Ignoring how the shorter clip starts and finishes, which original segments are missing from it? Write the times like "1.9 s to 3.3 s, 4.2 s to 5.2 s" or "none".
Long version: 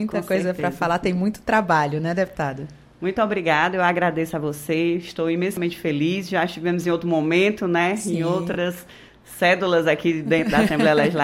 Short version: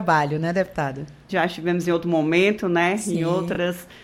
2.9 s to 6.3 s